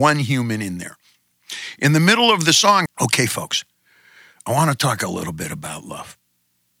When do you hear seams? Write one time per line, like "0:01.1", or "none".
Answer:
0:02.9